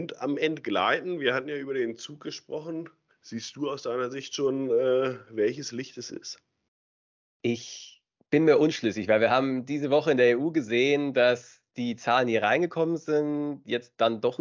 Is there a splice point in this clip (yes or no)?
no